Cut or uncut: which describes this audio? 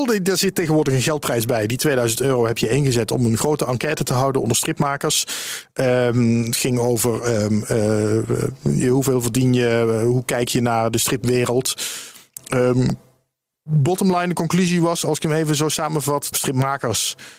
cut